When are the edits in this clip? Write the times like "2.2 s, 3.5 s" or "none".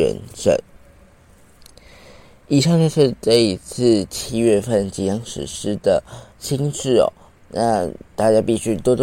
6.3 s